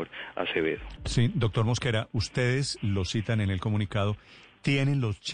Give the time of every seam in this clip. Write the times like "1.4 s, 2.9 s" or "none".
1.0 s